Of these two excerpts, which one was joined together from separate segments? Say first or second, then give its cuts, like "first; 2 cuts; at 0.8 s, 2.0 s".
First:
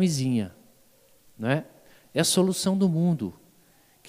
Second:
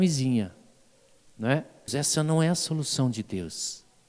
second; 1 cut; at 1.9 s